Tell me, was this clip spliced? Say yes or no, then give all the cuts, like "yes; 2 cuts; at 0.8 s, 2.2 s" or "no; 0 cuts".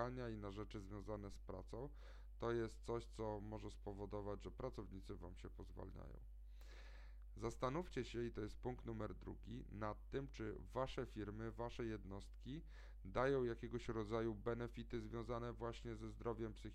no; 0 cuts